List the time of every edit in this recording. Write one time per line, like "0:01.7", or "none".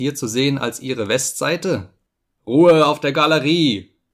none

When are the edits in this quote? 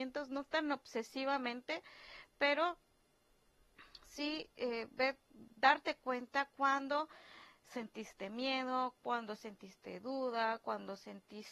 none

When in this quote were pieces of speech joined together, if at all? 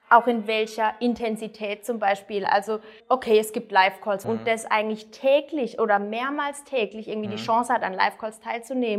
0:03.0
0:04.2

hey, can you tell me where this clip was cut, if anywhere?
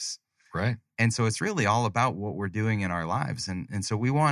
none

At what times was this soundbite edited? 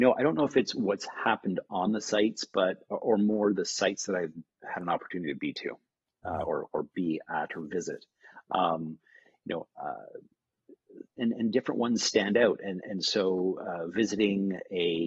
none

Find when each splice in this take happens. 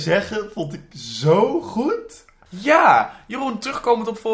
0:02.5

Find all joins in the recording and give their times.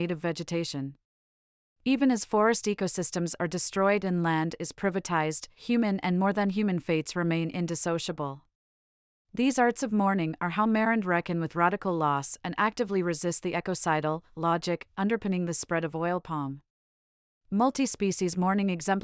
none

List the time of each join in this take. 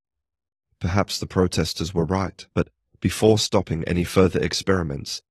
0:02.5

